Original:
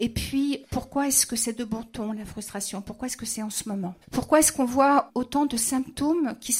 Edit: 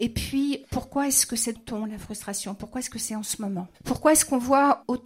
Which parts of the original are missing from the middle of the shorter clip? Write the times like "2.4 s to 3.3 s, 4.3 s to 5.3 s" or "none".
1.6 s to 1.8 s